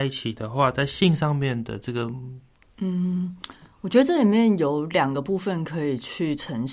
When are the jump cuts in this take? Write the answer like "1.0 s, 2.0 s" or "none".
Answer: 2.6 s